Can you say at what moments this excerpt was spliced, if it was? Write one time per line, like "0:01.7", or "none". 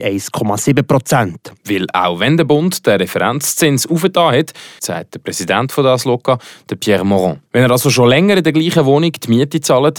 0:01.6
0:04.8
0:07.5